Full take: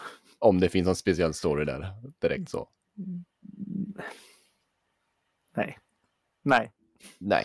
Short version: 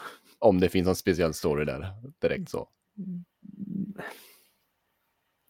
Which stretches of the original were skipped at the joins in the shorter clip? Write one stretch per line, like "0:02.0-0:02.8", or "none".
none